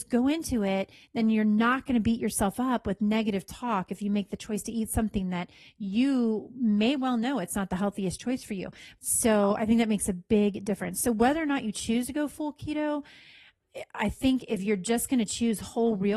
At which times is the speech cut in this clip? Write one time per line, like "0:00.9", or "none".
0:09.0